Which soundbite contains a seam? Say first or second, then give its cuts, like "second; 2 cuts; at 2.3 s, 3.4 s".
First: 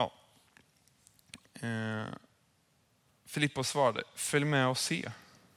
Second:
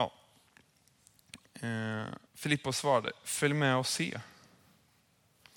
second; 1 cut; at 2.3 s